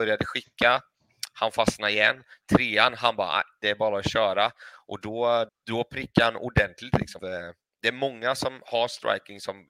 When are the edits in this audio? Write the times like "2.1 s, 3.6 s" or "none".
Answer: 5.5 s, 7.2 s